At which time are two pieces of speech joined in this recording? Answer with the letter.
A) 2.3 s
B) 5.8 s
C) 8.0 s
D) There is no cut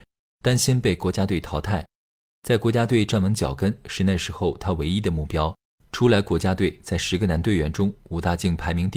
B